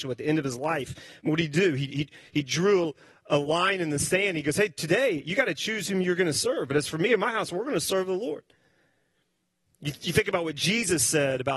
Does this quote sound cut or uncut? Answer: uncut